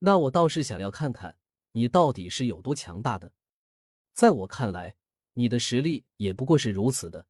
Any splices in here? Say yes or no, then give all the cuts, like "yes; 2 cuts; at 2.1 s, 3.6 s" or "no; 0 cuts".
yes; 1 cut; at 4.0 s